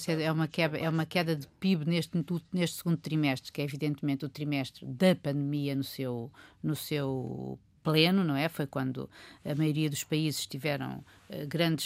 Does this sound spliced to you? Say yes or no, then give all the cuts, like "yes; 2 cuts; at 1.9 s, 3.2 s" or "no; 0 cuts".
no; 0 cuts